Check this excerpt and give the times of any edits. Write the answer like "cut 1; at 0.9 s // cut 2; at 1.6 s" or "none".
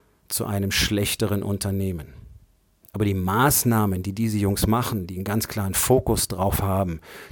cut 1; at 2.8 s